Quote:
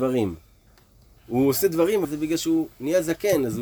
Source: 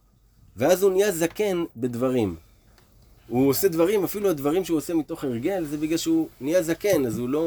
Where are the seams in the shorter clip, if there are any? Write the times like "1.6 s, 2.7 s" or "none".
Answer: 2.0 s